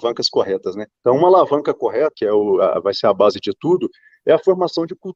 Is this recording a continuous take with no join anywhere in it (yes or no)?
no